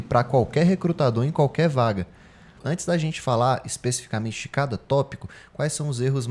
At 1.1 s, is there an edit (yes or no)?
no